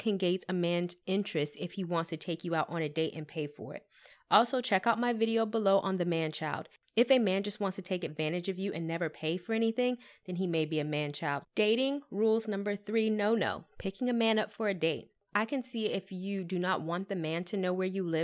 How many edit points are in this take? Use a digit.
1